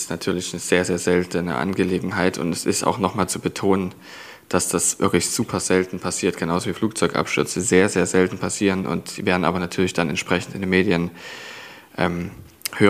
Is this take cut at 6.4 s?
no; 0 cuts

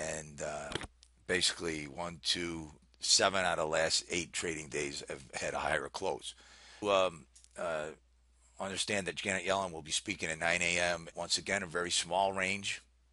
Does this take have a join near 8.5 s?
no; 3 cuts; at 2.8 s, 6.8 s, 11.1 s

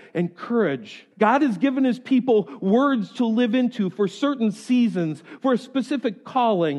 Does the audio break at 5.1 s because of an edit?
no; 1 cut; at 1.1 s

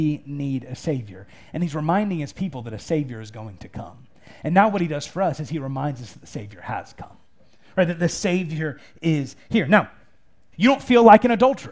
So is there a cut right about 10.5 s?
yes; 1 cut; at 10.5 s

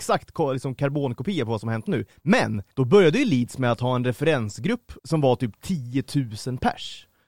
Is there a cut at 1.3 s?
no; 2 cuts; at 2.7 s, 5.0 s

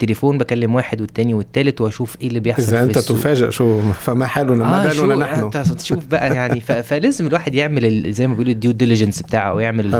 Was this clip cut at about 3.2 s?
no; 0 cuts

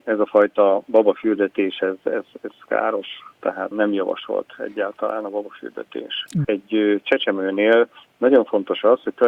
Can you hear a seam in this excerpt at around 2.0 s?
no; 2 cuts; at 3.7 s, 6.4 s

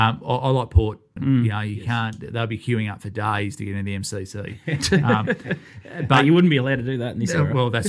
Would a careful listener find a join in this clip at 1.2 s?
yes; 1 cut; at 1.2 s

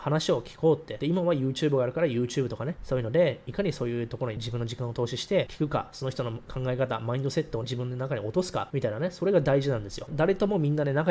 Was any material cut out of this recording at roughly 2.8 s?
no; 1 cut; at 10.1 s

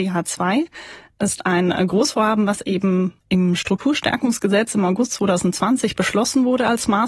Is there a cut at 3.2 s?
yes; 1 cut; at 3.2 s

